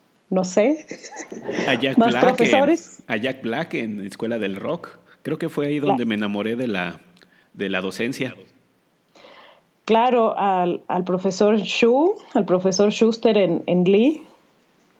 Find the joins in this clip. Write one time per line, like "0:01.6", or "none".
none

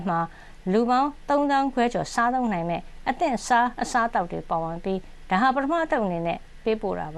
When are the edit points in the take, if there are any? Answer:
none

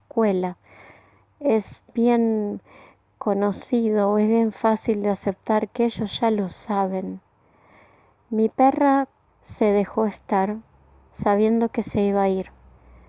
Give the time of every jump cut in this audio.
0:09.3

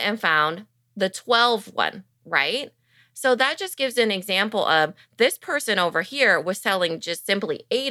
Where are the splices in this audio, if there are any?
none

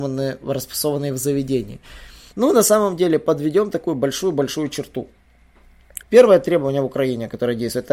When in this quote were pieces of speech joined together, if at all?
0:02.3
0:06.0

